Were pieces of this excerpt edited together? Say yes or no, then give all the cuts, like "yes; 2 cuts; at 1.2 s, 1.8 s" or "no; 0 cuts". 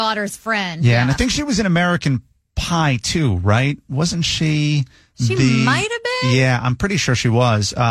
no; 0 cuts